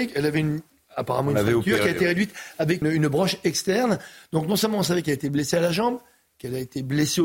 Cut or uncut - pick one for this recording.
cut